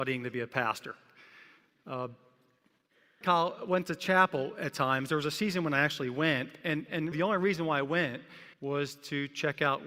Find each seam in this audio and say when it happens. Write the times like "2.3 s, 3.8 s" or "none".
3.2 s, 7.1 s, 8.5 s

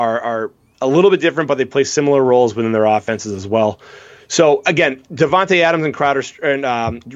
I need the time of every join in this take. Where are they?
none

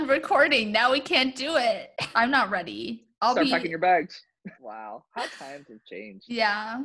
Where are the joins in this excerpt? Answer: 2.1 s, 4.5 s

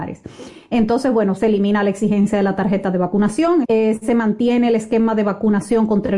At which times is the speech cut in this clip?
1.4 s, 3.6 s

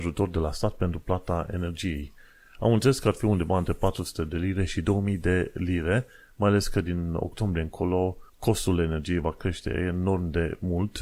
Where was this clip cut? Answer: 8.3 s

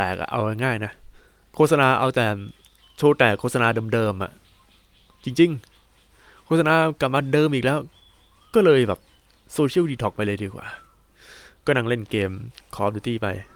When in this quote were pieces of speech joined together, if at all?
none

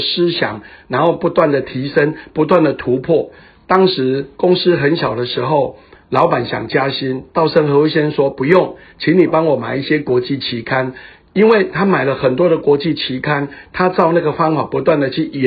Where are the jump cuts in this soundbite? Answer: none

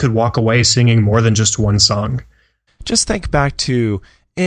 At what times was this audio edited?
2.7 s

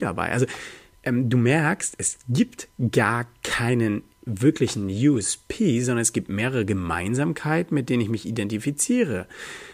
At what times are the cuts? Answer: none

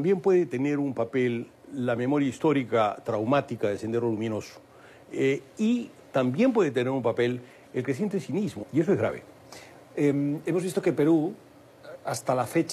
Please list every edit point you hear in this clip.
8.6 s

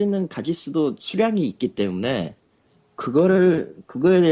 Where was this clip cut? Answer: none

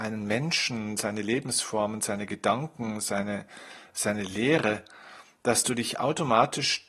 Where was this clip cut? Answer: none

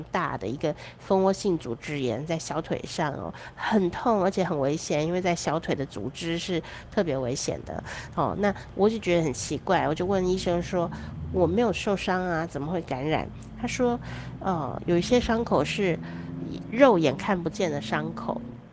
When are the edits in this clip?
none

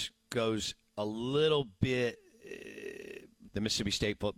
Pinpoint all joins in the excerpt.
3.5 s

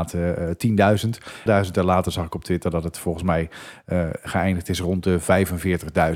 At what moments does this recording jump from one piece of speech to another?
1.5 s

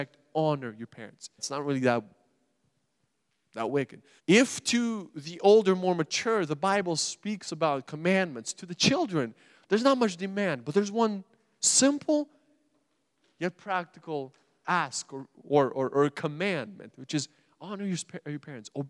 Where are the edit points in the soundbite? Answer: 1.4 s, 4.2 s

